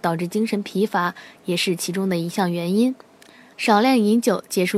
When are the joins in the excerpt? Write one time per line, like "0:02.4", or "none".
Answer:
0:03.5